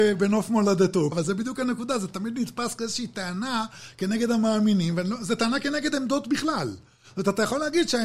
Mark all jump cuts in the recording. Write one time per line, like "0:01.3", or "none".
0:01.1